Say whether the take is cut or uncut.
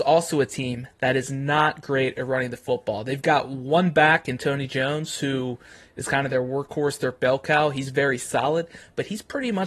uncut